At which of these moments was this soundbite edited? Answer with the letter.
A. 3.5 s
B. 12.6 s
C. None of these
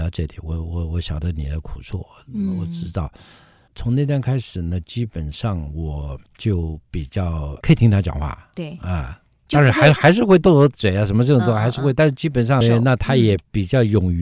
B